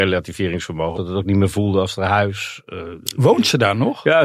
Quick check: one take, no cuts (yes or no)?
no